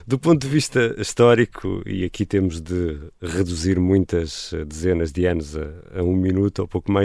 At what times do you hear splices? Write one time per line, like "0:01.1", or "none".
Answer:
none